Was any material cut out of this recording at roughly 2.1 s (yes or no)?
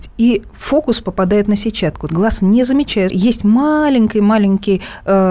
yes